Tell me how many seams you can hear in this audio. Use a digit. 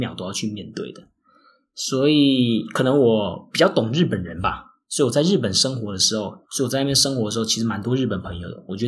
1